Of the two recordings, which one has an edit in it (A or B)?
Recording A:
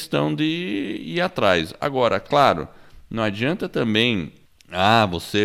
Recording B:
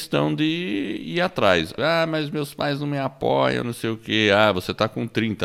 B